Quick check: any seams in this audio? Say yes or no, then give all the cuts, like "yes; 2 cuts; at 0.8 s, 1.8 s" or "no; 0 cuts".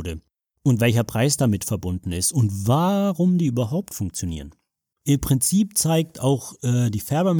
yes; 1 cut; at 4.9 s